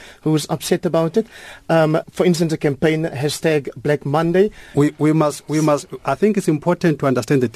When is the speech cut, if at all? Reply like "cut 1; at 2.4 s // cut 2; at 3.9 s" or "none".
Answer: cut 1; at 2.0 s // cut 2; at 4.7 s